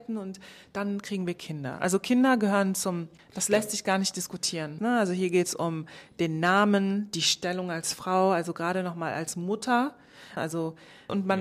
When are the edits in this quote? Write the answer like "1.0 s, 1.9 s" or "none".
4.8 s, 10.4 s